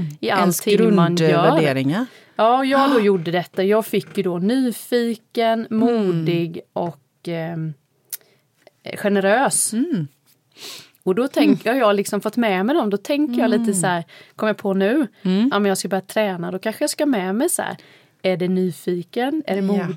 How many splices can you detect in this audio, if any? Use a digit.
0